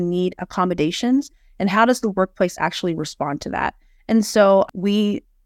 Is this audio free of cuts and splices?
yes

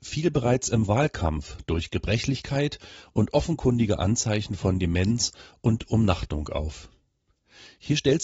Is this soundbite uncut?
yes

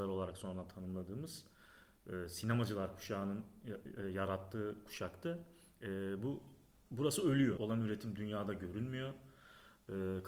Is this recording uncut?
no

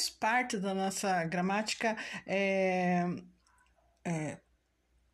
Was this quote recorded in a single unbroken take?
yes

